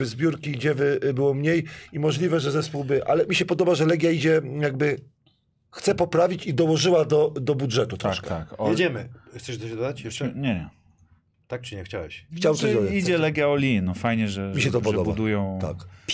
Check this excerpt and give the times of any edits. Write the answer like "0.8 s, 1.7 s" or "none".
none